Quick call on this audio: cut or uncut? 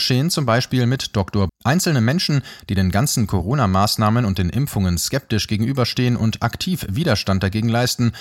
cut